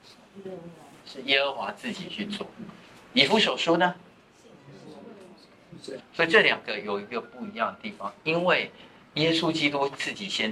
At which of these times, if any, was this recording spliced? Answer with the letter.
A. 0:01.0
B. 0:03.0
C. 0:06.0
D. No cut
C